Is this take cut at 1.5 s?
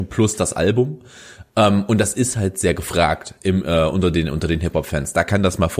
no; 0 cuts

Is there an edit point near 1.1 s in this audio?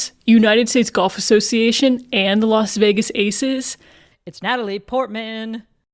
no; 1 cut; at 4.1 s

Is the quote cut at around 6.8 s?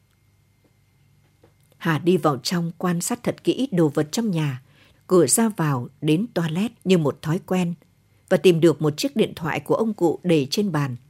yes; 2 cuts; at 4.9 s, 6.8 s

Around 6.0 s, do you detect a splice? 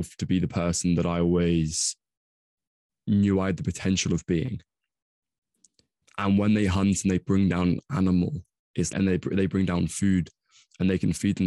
yes; 2 cuts; at 6.0 s, 8.9 s

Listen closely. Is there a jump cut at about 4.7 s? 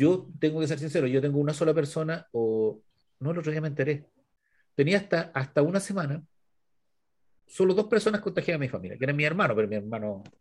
no; 1 cut; at 2.3 s

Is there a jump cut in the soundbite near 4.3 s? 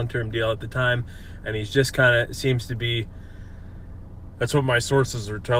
yes; 1 cut; at 4.3 s

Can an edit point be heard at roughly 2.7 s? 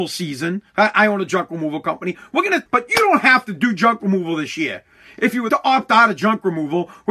yes; 2 cuts; at 2.7 s, 5.5 s

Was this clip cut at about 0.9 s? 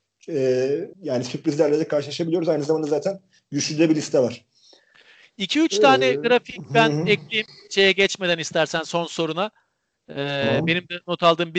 yes; 1 cut; at 0.9 s

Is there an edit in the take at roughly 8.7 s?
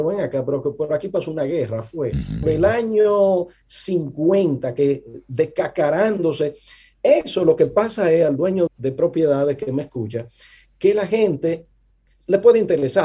yes; 2 cuts; at 2.4 s, 8.7 s

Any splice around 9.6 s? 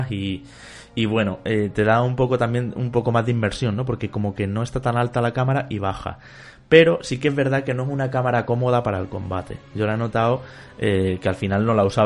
no; 0 cuts

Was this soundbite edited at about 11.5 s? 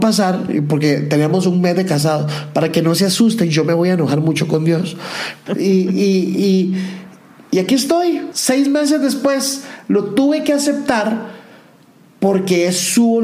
no; 2 cuts; at 5.5 s, 8.3 s

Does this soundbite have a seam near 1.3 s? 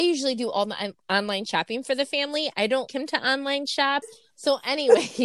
no; 2 cuts; at 2.9 s, 4.0 s

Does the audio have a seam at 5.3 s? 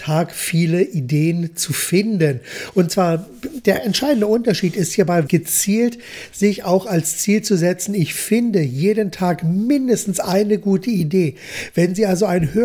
yes; 1 cut; at 5.3 s

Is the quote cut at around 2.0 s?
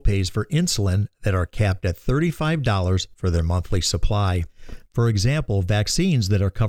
no; 1 cut; at 4.9 s

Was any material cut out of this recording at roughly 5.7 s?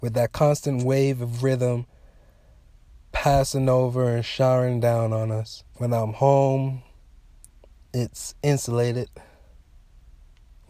yes; 1 cut; at 5.7 s

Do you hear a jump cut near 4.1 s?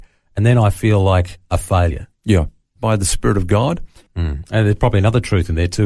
yes; 2 cuts; at 2.8 s, 4.1 s

